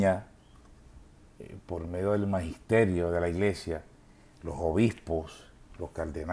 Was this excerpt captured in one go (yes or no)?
yes